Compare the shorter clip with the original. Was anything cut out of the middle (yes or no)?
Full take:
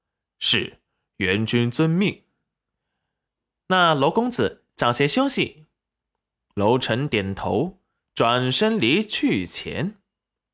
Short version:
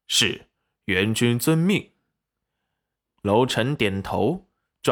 yes